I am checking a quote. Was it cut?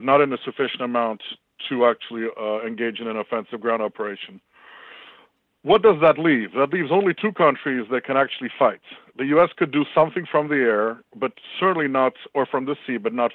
no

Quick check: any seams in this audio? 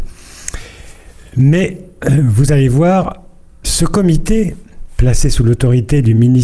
no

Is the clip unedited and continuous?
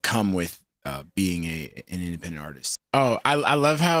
no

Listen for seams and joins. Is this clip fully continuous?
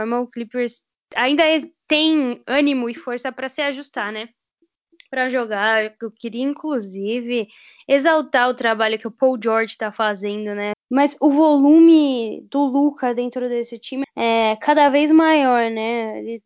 no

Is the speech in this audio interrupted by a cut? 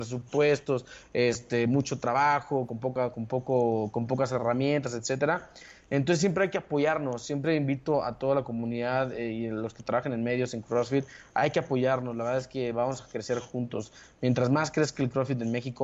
no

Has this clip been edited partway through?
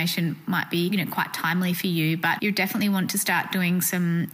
no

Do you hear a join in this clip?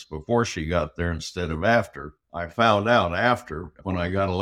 yes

